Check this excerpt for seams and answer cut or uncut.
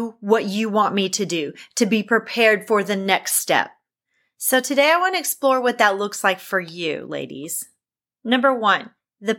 uncut